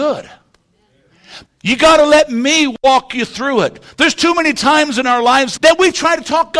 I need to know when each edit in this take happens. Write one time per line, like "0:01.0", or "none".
0:01.4
0:05.6